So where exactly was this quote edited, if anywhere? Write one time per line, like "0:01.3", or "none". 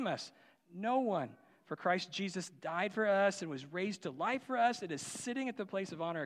none